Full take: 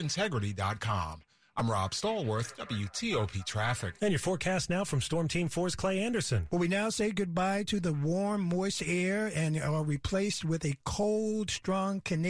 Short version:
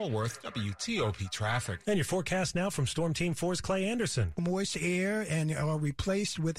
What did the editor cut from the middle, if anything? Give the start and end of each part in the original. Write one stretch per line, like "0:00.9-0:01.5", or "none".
0:06.5-0:08.4